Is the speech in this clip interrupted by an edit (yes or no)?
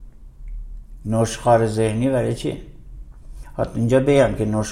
yes